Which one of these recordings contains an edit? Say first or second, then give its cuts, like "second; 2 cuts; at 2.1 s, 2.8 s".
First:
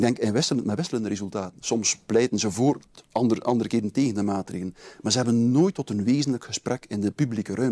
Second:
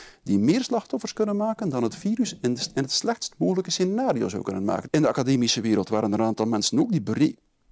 second; 1 cut; at 4.8 s